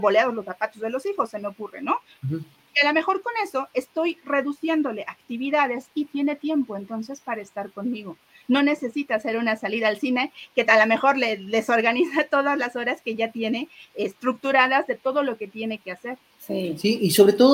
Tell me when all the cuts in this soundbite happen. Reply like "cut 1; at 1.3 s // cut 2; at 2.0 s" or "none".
cut 1; at 2.2 s // cut 2; at 16.3 s